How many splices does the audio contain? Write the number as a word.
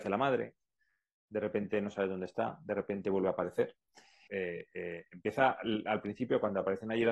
one